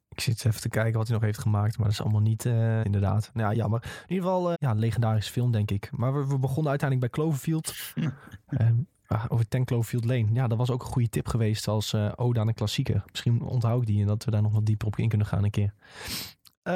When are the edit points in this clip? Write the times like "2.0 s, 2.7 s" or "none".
2.8 s, 4.5 s